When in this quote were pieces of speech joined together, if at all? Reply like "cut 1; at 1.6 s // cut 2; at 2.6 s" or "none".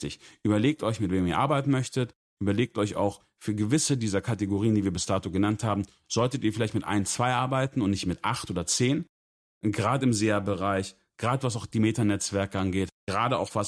none